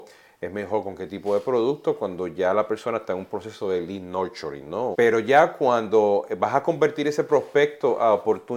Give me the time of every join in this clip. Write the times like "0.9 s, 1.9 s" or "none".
4.9 s